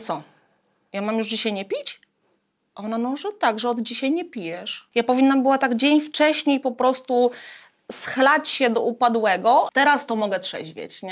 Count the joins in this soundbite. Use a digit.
2